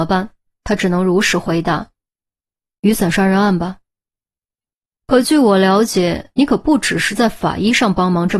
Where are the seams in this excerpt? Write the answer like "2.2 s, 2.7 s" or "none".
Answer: 4.2 s